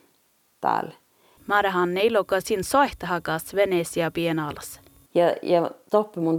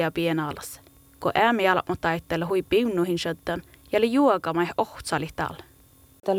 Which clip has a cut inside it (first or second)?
first